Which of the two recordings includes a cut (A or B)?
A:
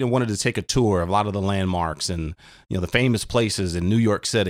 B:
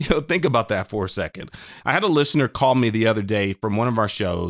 B